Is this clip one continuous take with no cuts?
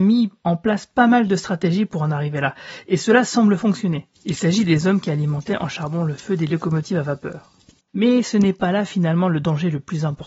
no; 2 cuts; at 4.1 s, 7.8 s

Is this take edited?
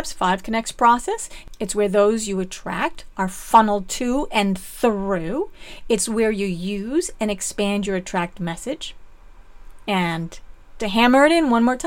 yes; 1 cut; at 10.8 s

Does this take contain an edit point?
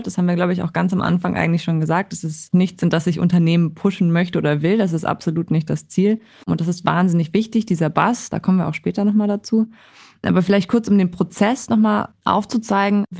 yes; 1 cut; at 6.4 s

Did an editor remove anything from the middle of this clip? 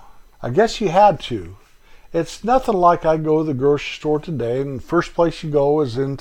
no; 0 cuts

